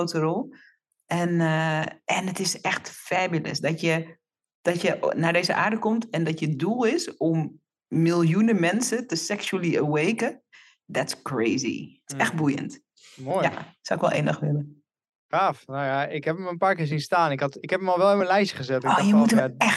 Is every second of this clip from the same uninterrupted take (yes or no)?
yes